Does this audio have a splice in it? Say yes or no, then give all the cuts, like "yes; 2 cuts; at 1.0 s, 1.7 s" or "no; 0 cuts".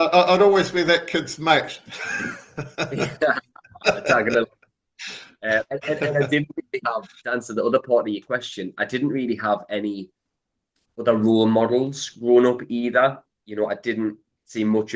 no; 0 cuts